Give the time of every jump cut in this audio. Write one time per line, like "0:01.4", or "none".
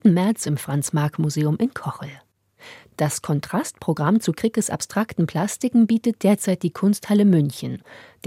none